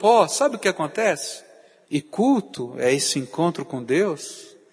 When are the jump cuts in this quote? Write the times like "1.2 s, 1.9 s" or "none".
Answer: 1.8 s